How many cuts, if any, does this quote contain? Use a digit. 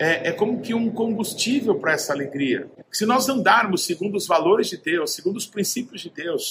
1